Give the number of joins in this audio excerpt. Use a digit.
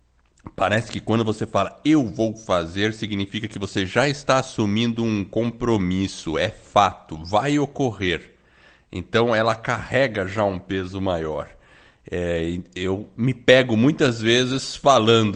0